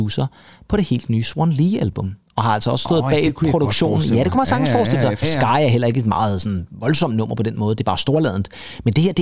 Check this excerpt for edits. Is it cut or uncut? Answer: cut